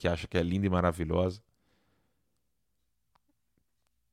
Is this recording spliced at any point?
no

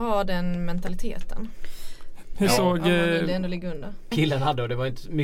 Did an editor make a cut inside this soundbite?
yes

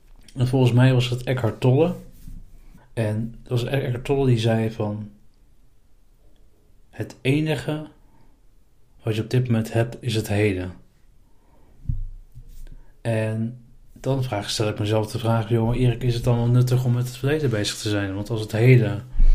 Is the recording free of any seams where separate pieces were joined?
no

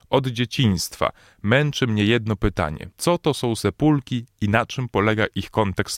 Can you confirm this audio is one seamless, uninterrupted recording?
no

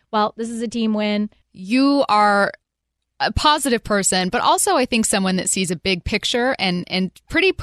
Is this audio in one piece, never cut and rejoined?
no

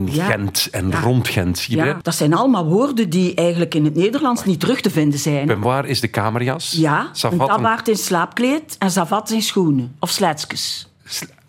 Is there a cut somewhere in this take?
yes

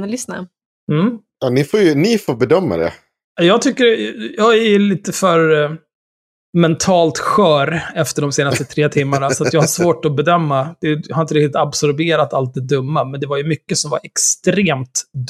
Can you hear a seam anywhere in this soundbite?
no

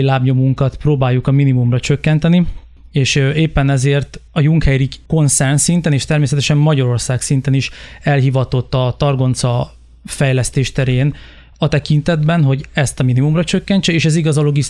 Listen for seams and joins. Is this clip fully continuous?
yes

